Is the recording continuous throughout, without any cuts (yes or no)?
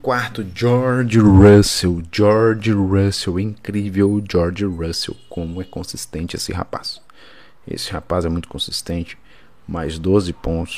yes